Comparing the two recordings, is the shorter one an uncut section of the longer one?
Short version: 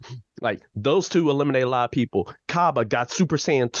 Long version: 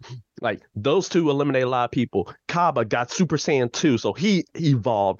yes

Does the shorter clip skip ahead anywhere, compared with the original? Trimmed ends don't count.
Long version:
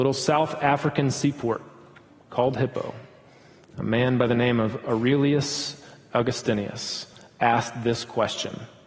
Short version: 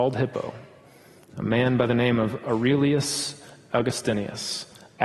no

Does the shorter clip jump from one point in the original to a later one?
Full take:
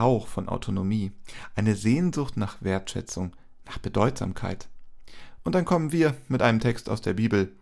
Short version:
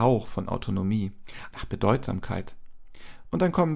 yes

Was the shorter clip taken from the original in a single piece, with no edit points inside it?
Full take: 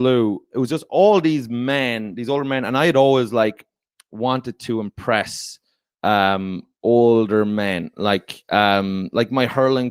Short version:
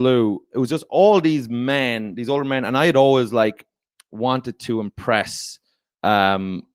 yes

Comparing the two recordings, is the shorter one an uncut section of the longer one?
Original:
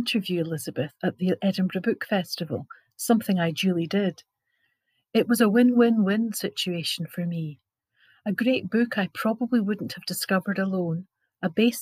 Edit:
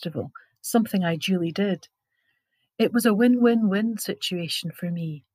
yes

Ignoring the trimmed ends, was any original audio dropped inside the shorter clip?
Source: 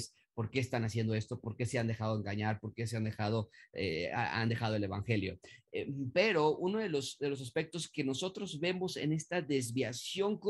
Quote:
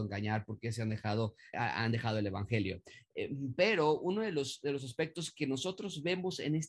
yes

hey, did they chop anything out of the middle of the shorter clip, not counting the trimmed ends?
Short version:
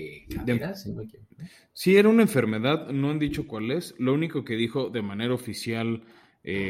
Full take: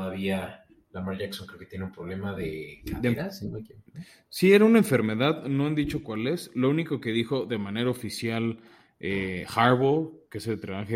no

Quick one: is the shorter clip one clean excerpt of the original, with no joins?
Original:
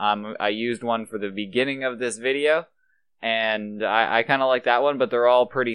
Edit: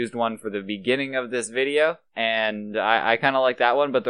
no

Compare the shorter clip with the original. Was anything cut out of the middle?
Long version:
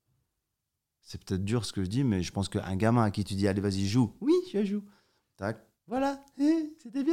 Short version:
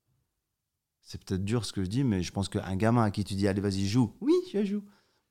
no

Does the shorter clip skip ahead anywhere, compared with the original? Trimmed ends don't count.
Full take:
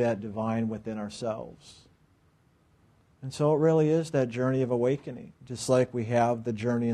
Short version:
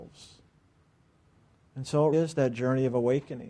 yes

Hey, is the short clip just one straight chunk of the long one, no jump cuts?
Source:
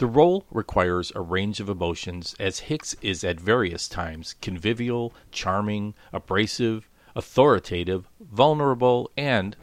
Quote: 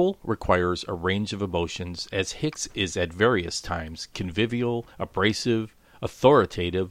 no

